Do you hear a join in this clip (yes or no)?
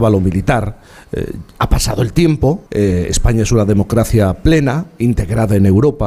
yes